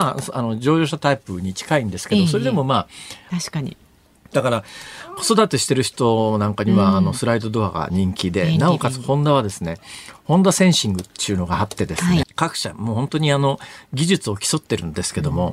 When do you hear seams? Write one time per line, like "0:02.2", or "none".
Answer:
0:03.3
0:12.2